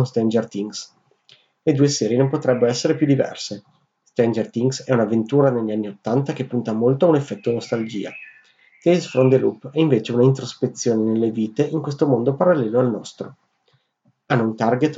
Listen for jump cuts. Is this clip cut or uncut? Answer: uncut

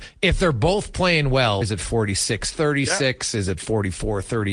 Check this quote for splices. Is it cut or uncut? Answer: cut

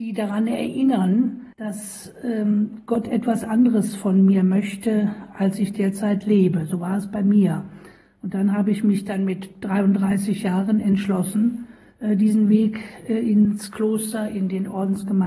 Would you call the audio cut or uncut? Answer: cut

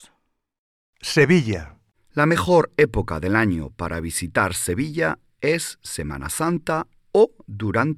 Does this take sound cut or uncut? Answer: cut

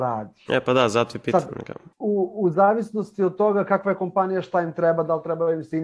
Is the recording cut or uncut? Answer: cut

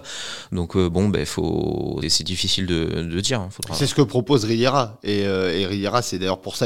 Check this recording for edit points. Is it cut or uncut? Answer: cut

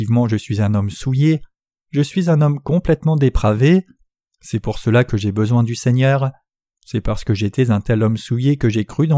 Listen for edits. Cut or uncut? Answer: cut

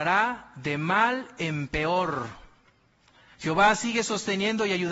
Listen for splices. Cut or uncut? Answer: cut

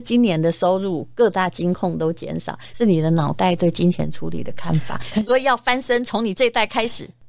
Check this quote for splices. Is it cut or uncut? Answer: cut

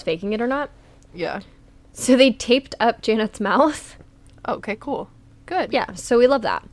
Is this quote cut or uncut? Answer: cut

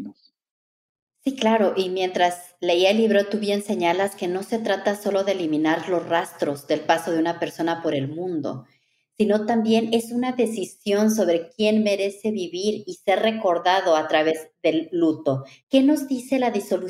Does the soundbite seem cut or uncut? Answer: cut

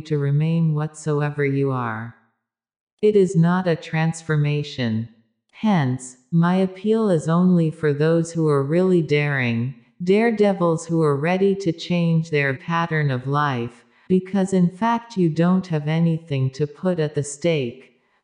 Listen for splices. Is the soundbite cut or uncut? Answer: cut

